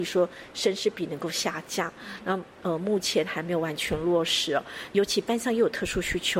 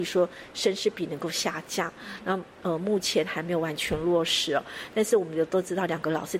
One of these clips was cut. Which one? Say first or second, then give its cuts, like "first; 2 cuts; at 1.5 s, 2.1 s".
first; 1 cut; at 4.9 s